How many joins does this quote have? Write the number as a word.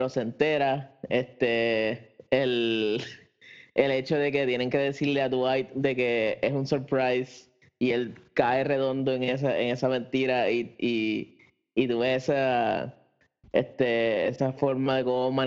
zero